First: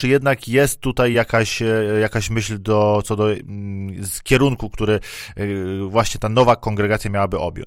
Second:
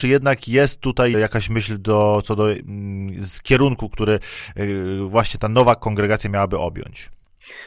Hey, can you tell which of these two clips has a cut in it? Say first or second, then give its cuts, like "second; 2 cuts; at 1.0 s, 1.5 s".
second; 1 cut; at 1.1 s